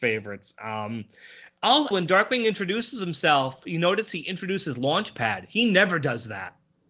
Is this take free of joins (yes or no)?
no